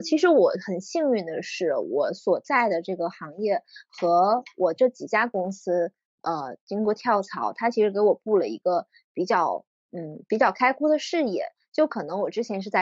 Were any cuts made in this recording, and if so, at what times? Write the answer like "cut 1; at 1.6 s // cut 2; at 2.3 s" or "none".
none

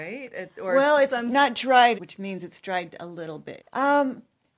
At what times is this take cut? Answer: cut 1; at 1.9 s // cut 2; at 3.6 s

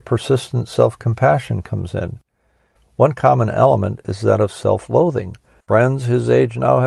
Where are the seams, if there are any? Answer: cut 1; at 2.8 s // cut 2; at 5.6 s

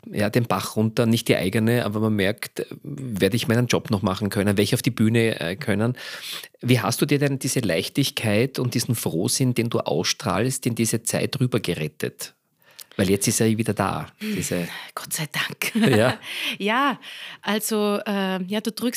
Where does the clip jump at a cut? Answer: none

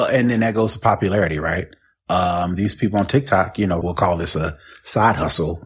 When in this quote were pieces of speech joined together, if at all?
cut 1; at 3.8 s

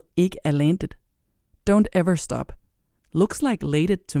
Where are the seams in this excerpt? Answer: cut 1; at 1.5 s // cut 2; at 3.0 s

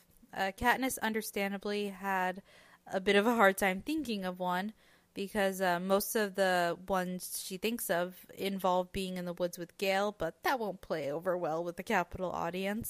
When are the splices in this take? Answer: none

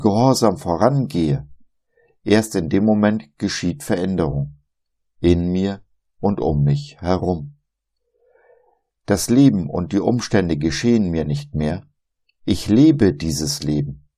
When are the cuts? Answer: none

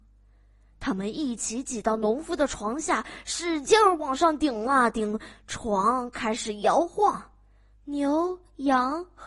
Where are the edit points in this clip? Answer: cut 1; at 7.7 s

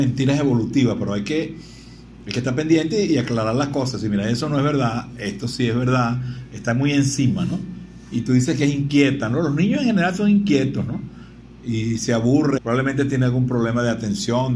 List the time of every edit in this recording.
cut 1; at 12.6 s

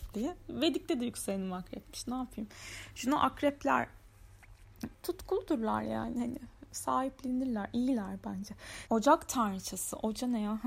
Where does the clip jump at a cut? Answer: cut 1; at 4.9 s // cut 2; at 8.9 s

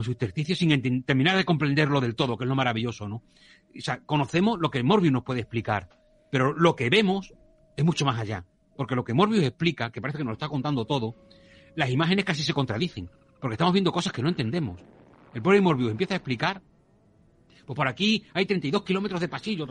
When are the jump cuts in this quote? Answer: none

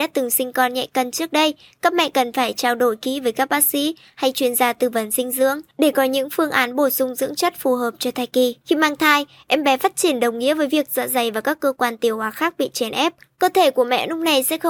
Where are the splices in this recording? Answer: cut 1; at 8.6 s

